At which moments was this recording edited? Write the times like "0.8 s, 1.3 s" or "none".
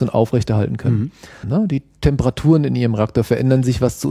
1.4 s